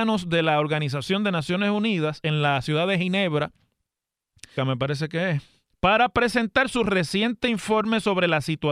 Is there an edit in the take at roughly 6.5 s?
no; 1 cut; at 4.6 s

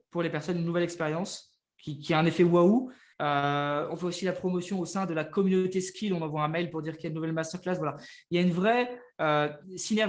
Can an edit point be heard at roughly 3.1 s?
yes; 1 cut; at 3.1 s

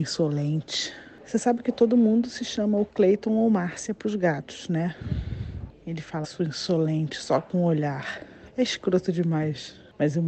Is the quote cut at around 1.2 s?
no; 1 cut; at 6.2 s

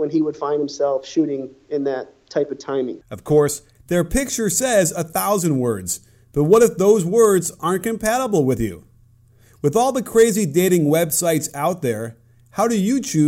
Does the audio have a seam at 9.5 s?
no; 1 cut; at 3.0 s

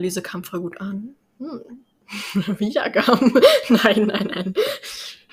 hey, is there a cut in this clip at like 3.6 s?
no; 0 cuts

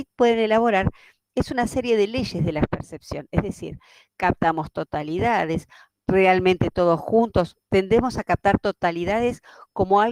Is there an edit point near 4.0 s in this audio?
no; 1 cut; at 5.9 s

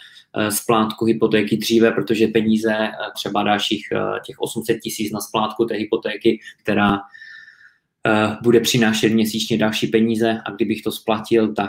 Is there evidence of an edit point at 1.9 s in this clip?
no; 2 cuts; at 3.1 s, 6.6 s

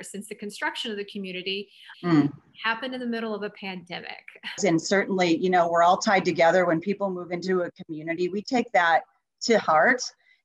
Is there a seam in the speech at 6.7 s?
no; 2 cuts; at 1.9 s, 4.6 s

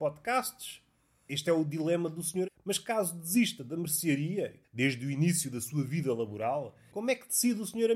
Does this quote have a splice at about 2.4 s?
yes; 2 cuts; at 2.4 s, 4.6 s

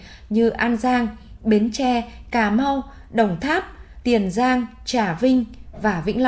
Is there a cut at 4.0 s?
yes; 1 cut; at 4.0 s

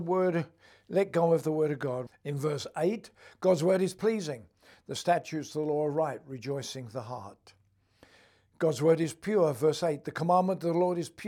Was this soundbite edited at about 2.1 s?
yes; 1 cut; at 2.1 s

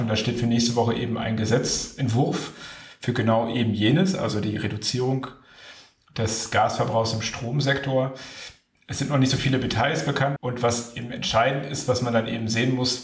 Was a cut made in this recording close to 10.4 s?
yes; 1 cut; at 10.4 s

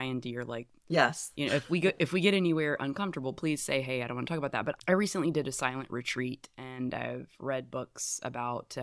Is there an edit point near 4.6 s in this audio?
no; 0 cuts

